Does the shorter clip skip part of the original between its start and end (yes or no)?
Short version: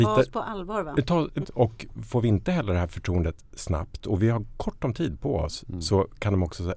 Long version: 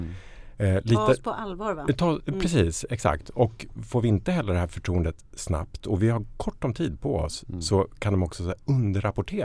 yes